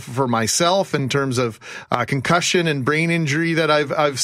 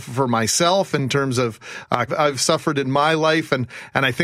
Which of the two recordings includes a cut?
second; 1 cut; at 2.1 s

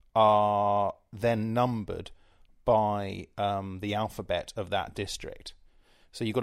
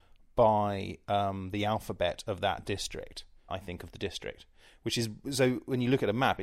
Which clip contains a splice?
second; 1 cut; at 3.5 s

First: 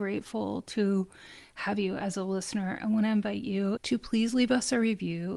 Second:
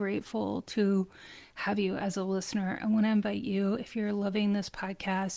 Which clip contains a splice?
first; 1 cut; at 3.8 s

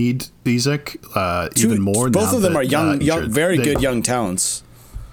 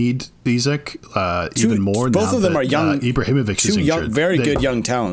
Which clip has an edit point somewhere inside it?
first; 1 cut; at 3.0 s

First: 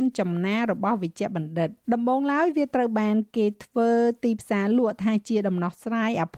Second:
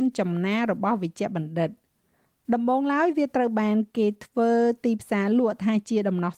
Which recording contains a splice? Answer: first; 1 cut; at 1.8 s

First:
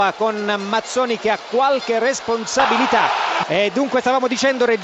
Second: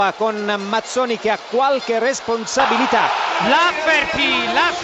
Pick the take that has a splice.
first; 1 cut; at 3.4 s

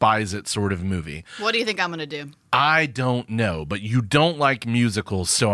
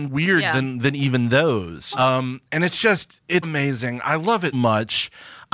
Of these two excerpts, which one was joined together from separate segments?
second; 3 cuts; at 1.9 s, 3.4 s, 4.5 s

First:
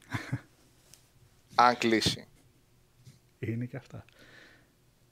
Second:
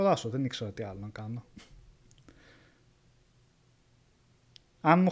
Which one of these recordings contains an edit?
first; 1 cut; at 2.3 s

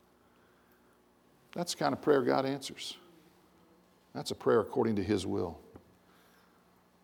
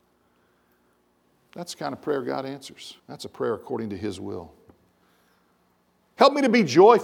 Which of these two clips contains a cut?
second; 1 cut; at 3.0 s

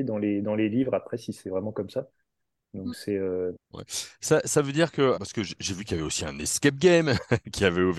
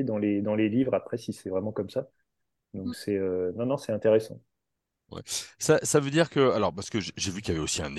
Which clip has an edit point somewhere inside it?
first; 2 cuts; at 3.5 s, 5.1 s

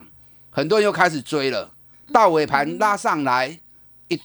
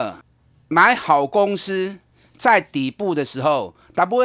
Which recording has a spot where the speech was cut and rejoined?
first; 1 cut; at 1.9 s

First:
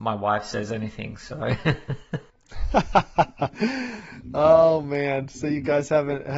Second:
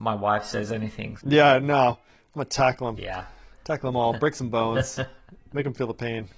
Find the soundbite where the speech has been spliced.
second; 1 cut; at 1.2 s

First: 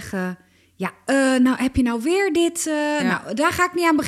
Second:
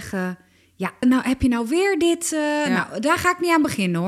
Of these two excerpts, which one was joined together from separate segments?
second; 1 cut; at 1.0 s

